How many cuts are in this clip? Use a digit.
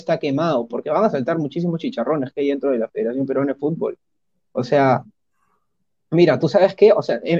0